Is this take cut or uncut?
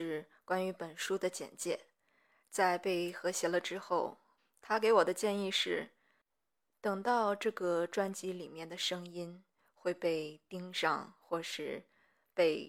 cut